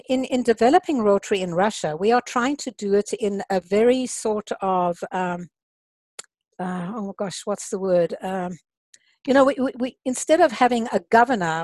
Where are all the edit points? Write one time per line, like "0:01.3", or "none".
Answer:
none